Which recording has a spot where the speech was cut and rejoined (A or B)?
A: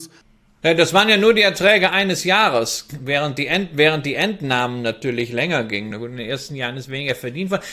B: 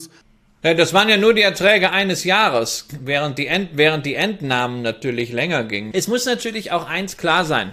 B